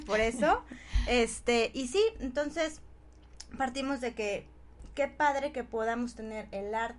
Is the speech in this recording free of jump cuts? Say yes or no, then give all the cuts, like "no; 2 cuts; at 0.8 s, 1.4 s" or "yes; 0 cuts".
yes; 0 cuts